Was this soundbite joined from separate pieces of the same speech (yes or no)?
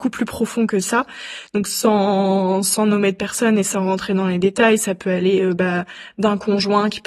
no